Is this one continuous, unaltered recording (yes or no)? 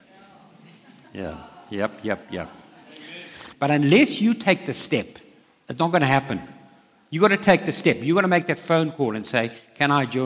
no